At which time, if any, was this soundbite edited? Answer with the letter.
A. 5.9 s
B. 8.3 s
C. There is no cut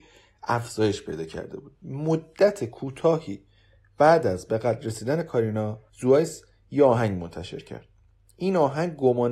A